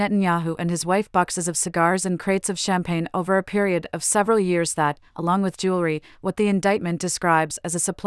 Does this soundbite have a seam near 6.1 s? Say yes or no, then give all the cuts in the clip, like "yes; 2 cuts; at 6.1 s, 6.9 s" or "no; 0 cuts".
yes; 1 cut; at 6.1 s